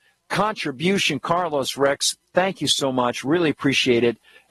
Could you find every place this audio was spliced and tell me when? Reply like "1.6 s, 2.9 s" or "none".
none